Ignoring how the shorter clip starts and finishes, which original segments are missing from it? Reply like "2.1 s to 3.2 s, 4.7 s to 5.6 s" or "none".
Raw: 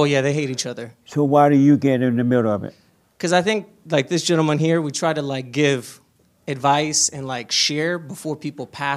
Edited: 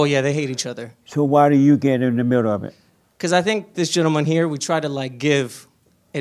3.7 s to 4.1 s